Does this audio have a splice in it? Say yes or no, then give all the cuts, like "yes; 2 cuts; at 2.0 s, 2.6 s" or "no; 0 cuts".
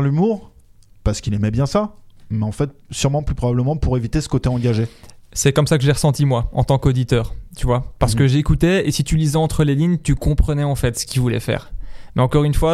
no; 0 cuts